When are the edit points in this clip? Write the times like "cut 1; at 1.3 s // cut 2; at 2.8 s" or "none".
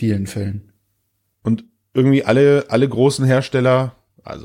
cut 1; at 1.3 s